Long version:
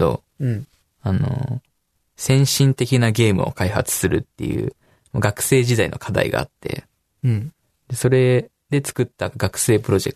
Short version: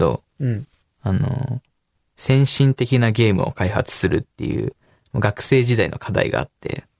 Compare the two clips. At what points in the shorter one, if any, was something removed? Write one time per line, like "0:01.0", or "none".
none